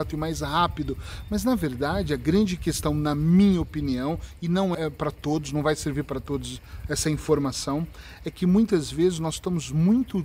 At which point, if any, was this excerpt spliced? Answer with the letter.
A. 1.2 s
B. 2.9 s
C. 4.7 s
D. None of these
C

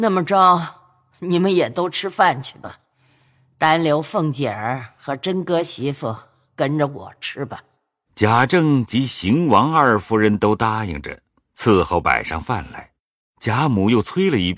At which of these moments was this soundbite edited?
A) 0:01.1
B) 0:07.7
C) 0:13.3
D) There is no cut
D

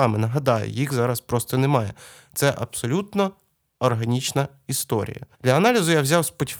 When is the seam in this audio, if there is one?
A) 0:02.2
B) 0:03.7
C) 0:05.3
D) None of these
C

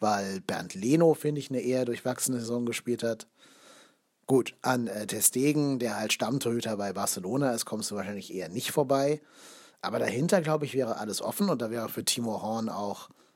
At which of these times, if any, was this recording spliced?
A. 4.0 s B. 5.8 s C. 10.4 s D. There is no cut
D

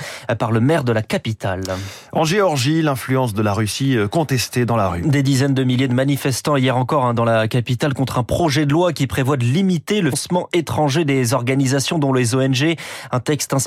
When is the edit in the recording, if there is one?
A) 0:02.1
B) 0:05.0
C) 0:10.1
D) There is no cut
C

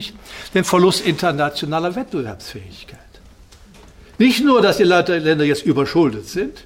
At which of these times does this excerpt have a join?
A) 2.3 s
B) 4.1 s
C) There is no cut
C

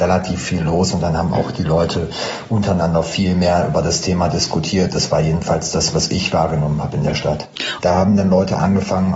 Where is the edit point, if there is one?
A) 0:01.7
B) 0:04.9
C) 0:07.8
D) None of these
C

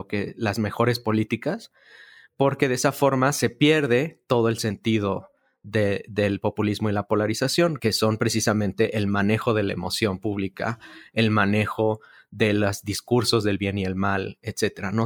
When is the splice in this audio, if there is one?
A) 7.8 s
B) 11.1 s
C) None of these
A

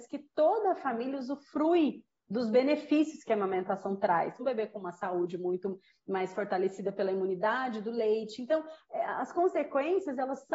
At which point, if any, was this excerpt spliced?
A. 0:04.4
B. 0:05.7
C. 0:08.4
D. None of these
A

